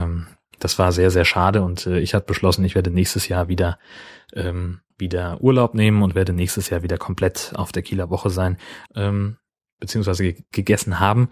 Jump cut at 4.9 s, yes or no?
yes